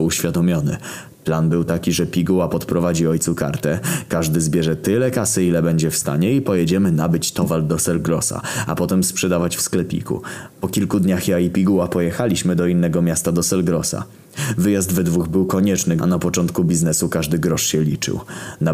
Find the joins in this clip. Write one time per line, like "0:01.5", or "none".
0:16.0